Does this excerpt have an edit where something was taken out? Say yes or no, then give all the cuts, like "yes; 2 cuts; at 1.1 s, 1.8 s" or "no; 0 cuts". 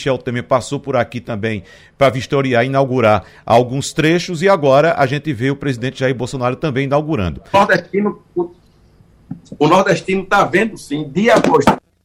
yes; 1 cut; at 7.5 s